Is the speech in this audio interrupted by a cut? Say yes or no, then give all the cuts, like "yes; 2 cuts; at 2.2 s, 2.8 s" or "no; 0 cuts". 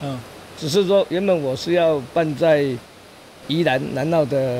no; 0 cuts